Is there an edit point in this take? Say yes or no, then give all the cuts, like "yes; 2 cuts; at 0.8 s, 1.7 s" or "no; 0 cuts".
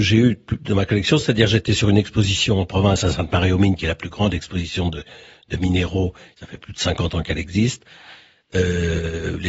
no; 0 cuts